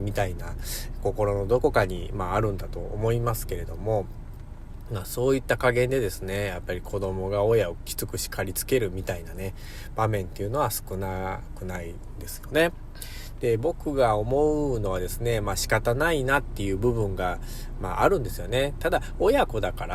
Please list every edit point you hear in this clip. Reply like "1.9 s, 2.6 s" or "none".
none